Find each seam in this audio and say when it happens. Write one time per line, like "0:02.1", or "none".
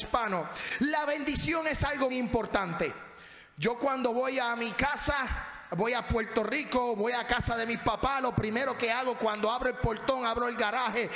0:02.1